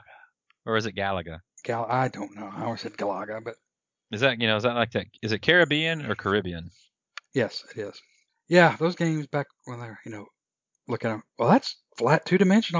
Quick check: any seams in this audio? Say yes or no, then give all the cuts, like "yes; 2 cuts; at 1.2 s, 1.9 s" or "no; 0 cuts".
no; 0 cuts